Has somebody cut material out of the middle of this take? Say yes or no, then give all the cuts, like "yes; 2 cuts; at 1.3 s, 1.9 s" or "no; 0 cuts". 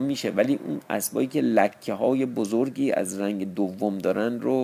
no; 0 cuts